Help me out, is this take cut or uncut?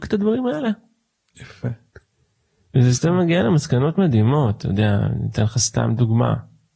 uncut